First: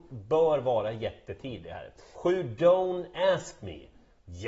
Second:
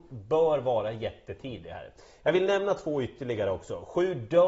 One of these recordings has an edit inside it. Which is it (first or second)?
first